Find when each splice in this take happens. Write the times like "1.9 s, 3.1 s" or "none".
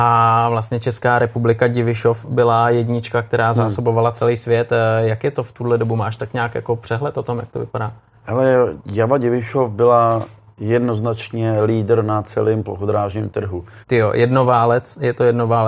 13.8 s

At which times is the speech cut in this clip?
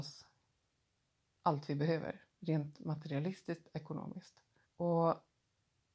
4.6 s

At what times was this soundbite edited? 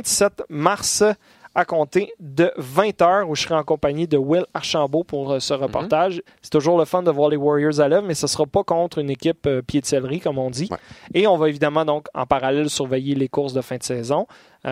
6.3 s

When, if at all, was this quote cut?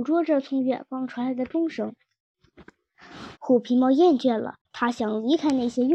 3.3 s, 4.6 s

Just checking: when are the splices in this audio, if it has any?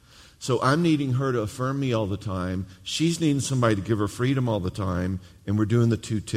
none

